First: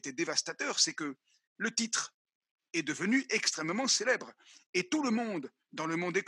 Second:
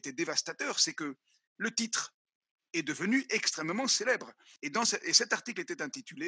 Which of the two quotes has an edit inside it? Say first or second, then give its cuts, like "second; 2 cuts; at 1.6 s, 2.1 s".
second; 1 cut; at 4.6 s